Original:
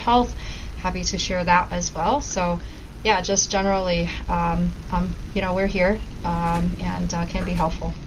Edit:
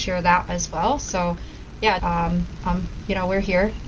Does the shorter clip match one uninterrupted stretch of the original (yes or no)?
no